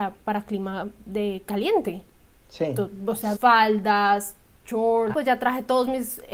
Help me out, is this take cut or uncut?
cut